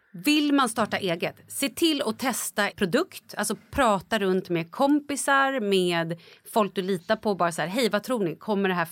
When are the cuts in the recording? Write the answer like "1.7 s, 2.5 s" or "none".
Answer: 2.7 s